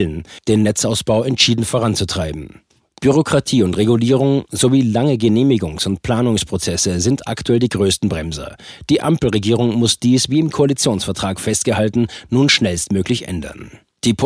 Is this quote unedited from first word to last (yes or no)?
yes